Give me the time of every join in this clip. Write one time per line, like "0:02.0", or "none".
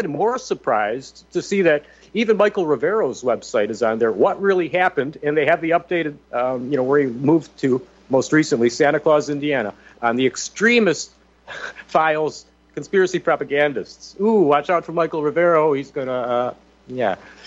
0:09.9